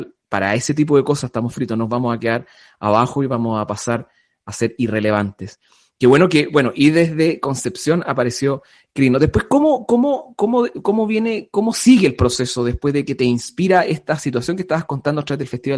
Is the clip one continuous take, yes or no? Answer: yes